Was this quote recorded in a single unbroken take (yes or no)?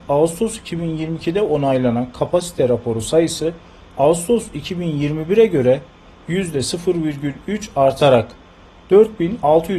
yes